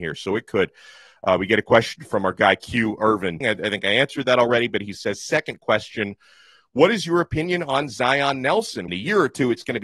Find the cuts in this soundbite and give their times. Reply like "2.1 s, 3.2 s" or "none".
3.4 s, 8.9 s